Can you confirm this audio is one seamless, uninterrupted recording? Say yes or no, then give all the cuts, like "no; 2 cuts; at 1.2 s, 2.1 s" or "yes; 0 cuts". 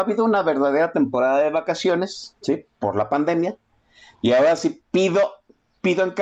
no; 1 cut; at 2.4 s